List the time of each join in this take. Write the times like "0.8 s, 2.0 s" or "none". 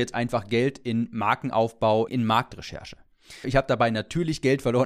2.1 s, 3.4 s